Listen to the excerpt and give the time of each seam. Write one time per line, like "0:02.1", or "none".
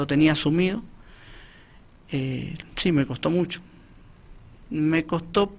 none